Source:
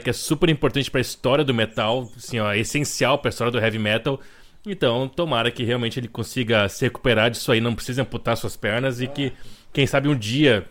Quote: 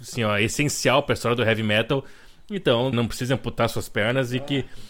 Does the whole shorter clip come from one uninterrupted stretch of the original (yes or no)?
no